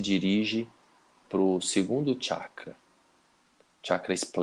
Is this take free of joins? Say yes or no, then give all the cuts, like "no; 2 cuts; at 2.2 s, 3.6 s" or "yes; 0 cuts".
yes; 0 cuts